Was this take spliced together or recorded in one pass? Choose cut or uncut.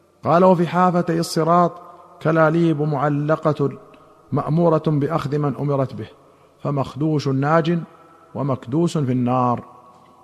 uncut